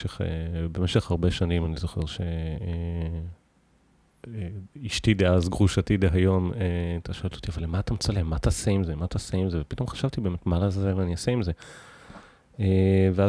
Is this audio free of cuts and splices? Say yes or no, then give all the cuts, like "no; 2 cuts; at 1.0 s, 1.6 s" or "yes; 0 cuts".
yes; 0 cuts